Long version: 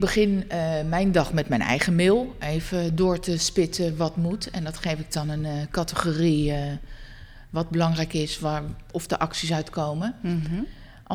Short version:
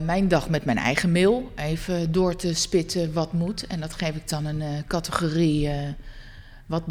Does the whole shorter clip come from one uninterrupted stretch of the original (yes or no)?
yes